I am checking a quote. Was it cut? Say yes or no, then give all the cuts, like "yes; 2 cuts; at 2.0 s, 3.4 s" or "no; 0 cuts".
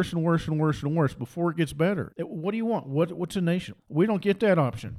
yes; 2 cuts; at 2.1 s, 3.8 s